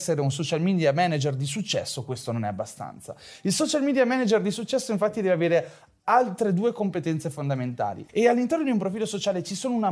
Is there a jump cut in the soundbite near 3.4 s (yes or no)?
no